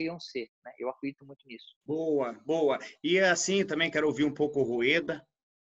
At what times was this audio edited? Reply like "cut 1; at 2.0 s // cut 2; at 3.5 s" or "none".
cut 1; at 1.8 s